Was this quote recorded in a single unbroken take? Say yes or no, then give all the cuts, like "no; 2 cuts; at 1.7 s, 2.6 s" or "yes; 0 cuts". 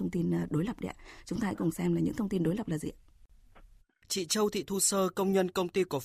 yes; 0 cuts